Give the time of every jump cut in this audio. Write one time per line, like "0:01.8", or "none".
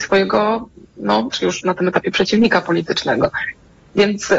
0:01.3

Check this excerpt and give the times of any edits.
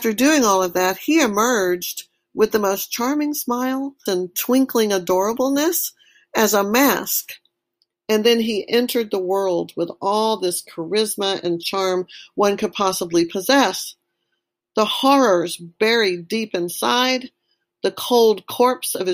0:04.1

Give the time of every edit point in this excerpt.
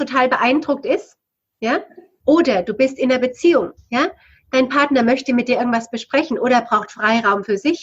0:02.2

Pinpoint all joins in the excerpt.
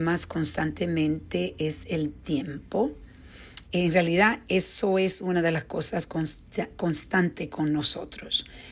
0:03.6

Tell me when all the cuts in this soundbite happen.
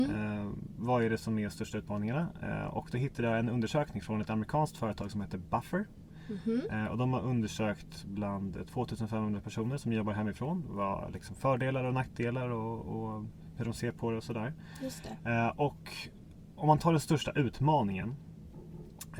none

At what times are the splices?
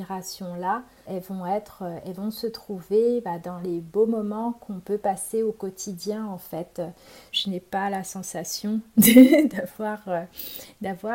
0:01.1
0:07.3

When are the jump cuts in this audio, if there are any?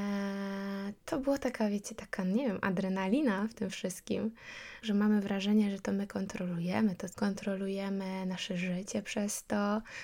0:04.8
0:07.1

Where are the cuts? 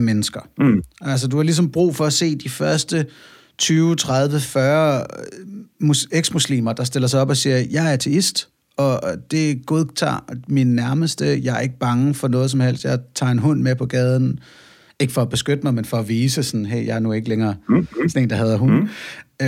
none

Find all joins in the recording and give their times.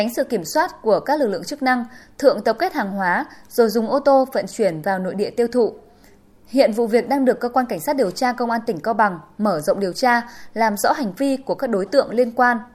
none

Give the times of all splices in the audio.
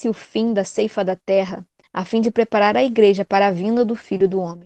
0:01.8

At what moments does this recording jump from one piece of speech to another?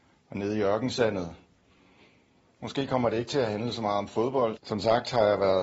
0:04.6

